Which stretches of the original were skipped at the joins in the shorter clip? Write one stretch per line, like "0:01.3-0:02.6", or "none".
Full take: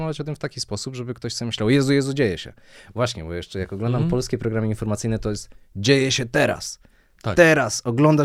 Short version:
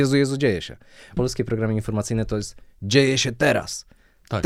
0:02.9-0:04.1